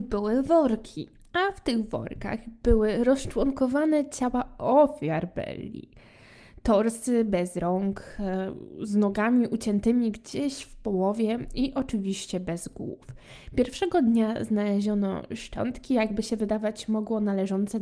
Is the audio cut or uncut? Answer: uncut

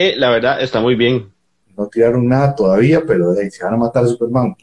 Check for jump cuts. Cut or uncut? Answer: cut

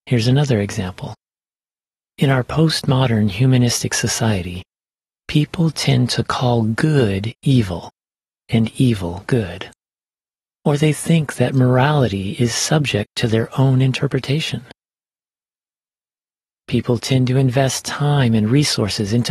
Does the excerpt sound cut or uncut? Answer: uncut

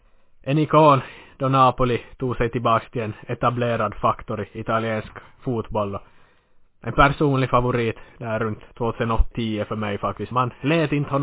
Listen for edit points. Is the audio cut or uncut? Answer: cut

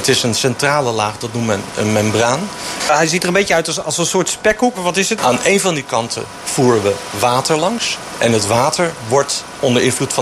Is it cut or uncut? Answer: cut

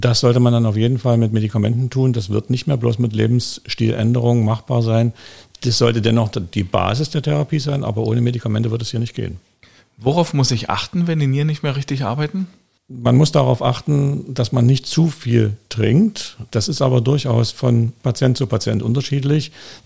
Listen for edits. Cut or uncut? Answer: uncut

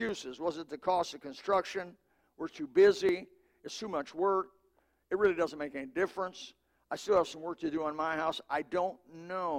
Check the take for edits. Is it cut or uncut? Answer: uncut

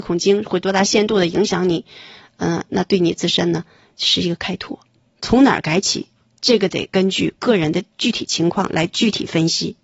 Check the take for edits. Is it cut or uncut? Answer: cut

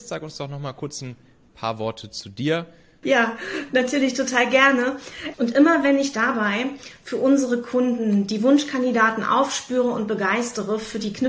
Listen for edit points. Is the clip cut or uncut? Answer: cut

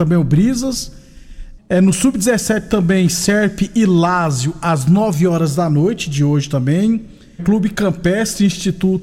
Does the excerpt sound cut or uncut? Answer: cut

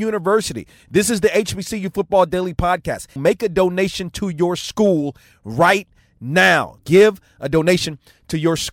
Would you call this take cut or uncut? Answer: cut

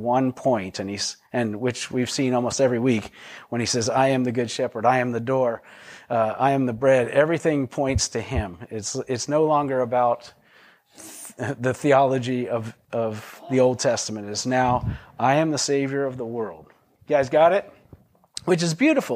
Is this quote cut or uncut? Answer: uncut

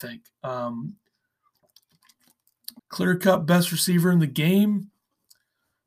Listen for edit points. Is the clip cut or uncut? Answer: cut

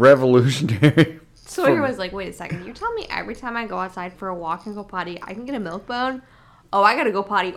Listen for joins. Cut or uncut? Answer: uncut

